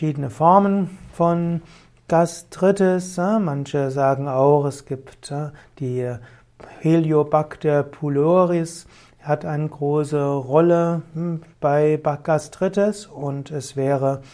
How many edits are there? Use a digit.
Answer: 0